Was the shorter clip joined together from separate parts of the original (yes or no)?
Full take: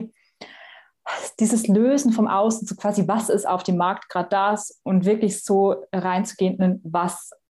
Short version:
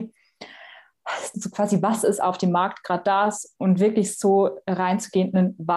yes